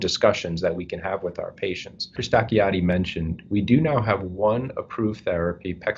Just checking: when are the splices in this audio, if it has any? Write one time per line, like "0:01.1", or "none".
0:02.2